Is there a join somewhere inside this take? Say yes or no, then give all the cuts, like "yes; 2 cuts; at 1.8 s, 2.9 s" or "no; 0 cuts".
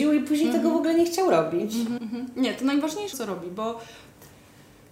yes; 2 cuts; at 2.0 s, 3.1 s